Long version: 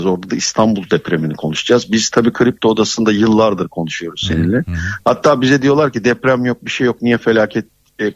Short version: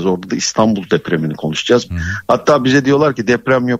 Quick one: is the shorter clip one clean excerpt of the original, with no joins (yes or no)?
no